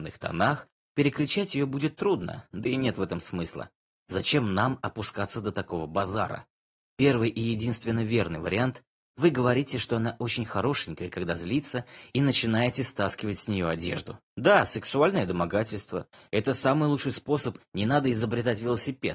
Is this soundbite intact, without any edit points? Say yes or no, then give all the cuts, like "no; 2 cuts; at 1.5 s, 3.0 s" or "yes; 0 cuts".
no; 2 cuts; at 14.3 s, 17.6 s